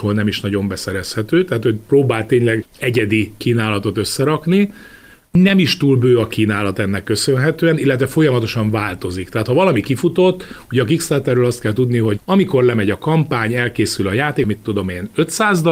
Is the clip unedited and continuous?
no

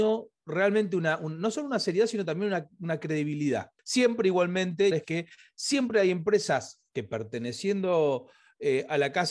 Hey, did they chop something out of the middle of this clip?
yes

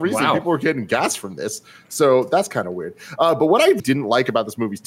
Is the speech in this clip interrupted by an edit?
yes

